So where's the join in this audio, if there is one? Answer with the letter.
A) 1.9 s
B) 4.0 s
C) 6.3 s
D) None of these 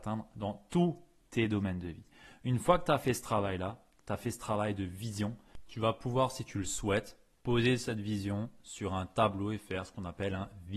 D